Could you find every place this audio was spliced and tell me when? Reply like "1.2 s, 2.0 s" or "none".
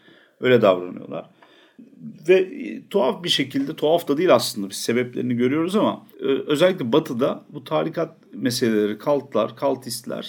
6.1 s